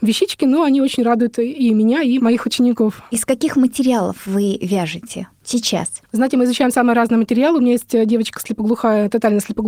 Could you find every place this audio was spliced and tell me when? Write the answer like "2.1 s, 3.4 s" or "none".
2.2 s, 5.3 s